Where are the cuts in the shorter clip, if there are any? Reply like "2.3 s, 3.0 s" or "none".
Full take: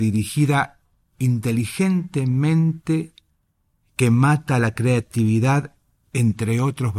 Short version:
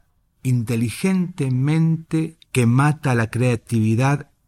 2.4 s